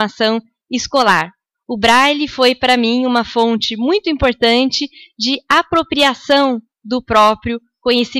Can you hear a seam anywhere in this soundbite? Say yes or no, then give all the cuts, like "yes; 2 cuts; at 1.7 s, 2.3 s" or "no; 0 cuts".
no; 0 cuts